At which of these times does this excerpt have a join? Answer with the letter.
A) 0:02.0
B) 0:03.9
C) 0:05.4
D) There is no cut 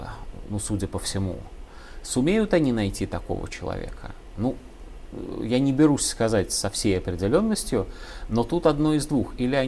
A